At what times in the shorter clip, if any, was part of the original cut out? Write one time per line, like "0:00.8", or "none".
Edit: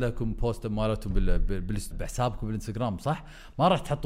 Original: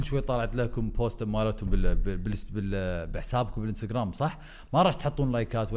0:01.9